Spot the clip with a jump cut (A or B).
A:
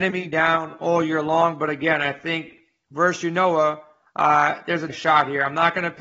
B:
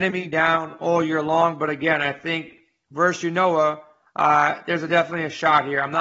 A